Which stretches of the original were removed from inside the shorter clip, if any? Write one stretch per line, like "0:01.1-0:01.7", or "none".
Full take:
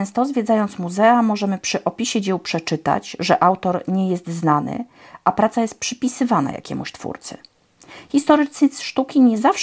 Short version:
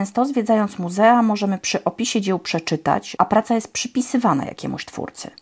0:03.2-0:05.2

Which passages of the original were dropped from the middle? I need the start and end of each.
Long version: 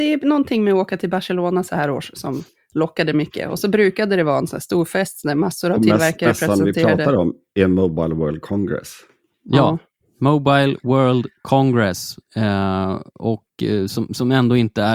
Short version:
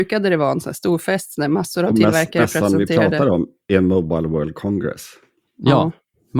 none

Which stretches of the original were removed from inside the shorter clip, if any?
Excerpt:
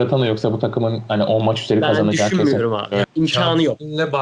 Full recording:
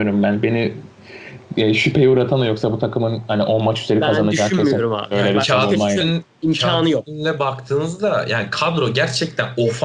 0:05.2-0:06.3

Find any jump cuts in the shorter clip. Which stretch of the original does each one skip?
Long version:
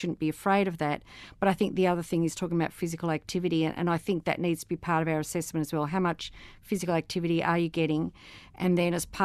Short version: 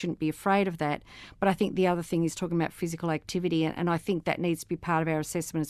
none

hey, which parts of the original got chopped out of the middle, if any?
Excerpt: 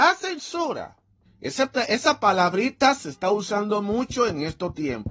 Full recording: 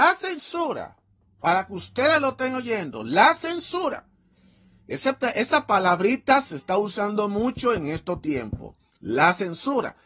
0:01.2-0:04.7

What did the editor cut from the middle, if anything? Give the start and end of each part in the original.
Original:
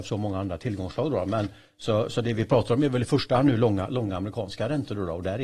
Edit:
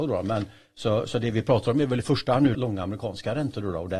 0:03.6-0:03.9

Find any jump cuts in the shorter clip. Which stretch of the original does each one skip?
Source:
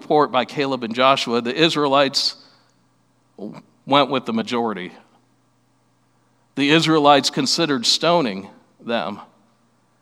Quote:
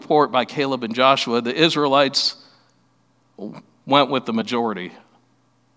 none

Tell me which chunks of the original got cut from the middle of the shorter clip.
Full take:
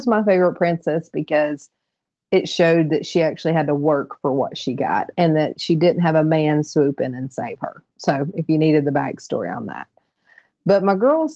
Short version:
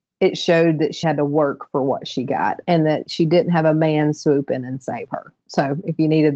0:03.1-0:03.5

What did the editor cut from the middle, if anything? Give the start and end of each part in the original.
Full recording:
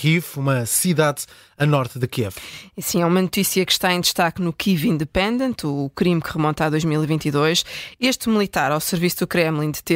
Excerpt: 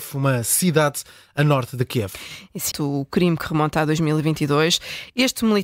0:02.9-0:05.6

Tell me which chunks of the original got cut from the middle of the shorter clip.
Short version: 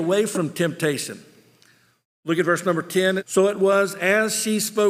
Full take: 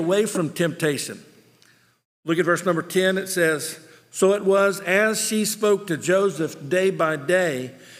0:03.2-0:04.0

